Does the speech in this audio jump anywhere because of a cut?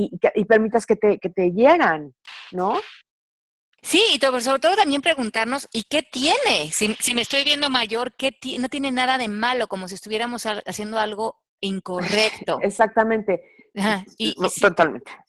no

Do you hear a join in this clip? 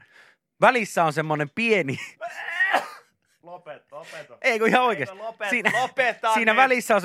no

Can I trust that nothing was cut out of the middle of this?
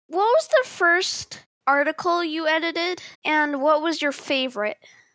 no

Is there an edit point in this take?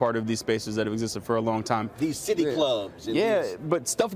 no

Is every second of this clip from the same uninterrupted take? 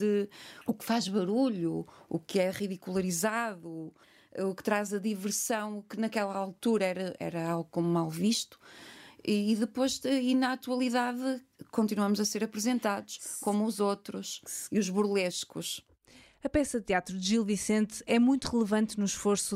yes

